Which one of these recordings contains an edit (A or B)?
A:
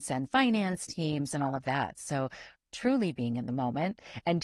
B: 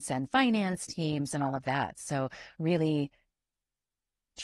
A